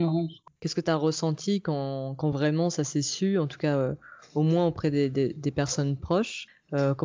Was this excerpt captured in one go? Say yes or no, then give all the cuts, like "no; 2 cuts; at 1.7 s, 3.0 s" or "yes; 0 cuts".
yes; 0 cuts